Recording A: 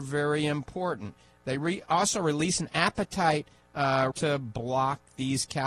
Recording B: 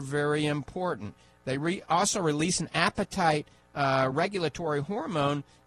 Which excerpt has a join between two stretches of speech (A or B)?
A